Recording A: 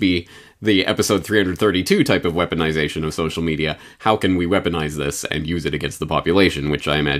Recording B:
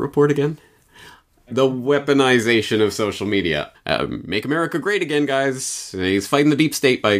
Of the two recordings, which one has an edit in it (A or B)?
B